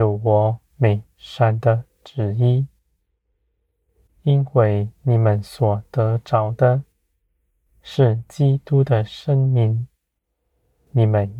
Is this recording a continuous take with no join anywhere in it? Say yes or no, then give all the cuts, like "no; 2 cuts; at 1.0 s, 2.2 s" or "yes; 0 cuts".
no; 1 cut; at 4.1 s